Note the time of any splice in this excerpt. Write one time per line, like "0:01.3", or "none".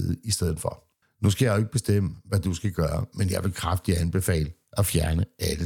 0:01.0